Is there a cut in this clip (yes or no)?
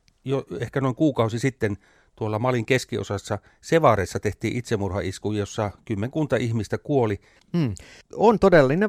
no